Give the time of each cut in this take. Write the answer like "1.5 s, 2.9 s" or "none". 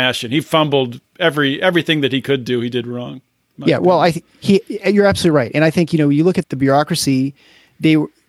6.4 s